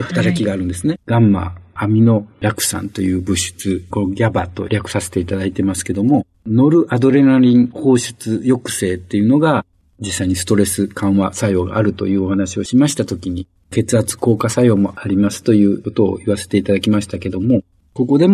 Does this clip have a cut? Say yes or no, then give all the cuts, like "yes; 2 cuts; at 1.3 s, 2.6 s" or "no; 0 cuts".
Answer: yes; 1 cut; at 1.0 s